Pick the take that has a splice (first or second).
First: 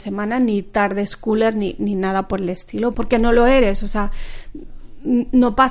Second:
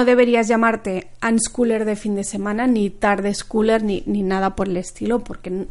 first